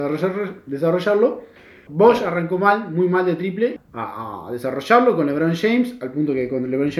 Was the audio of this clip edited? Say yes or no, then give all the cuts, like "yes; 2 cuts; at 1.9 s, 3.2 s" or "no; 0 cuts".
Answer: yes; 2 cuts; at 1.9 s, 3.8 s